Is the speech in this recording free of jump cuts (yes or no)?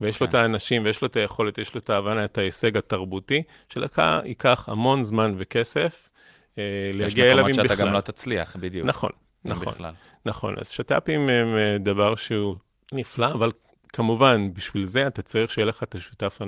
yes